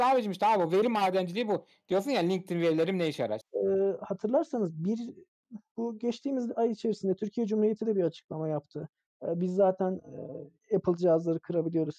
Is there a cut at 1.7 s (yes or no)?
no